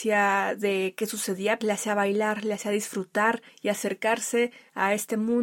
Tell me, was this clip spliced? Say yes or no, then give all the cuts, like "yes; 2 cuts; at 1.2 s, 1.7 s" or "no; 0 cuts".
yes; 1 cut; at 1.6 s